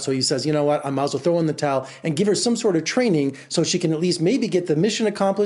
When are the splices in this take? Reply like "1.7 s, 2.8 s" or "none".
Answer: none